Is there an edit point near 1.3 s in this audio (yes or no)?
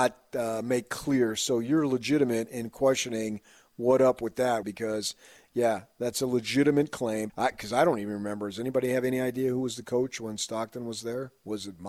no